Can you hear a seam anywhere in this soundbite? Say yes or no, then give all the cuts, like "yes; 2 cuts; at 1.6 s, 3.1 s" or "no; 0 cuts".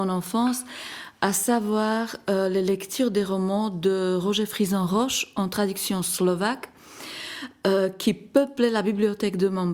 no; 0 cuts